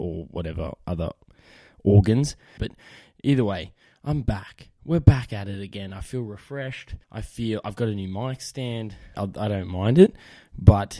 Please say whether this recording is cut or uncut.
cut